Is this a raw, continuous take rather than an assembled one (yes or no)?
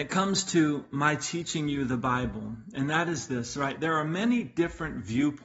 yes